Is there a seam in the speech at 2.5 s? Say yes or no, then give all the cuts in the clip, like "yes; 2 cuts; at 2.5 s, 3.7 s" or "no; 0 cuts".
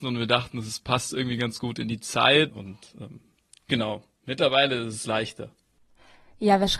yes; 1 cut; at 2.5 s